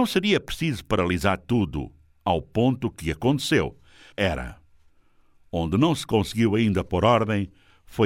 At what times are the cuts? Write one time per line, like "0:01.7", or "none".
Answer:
0:04.1